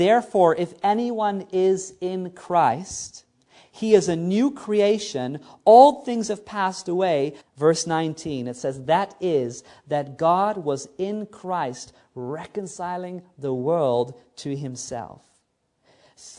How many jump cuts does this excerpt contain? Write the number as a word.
one